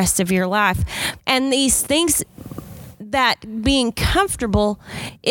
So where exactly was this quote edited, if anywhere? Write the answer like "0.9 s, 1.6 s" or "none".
1.2 s